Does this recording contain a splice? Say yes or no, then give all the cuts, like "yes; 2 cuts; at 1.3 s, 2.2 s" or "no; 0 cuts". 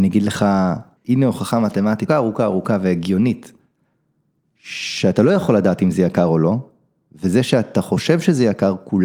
yes; 2 cuts; at 1.0 s, 2.1 s